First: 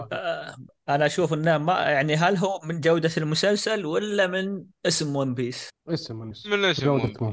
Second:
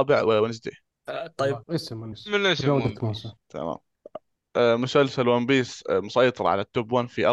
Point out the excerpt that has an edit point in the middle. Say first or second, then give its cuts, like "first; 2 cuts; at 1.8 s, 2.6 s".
second; 2 cuts; at 1.6 s, 3.4 s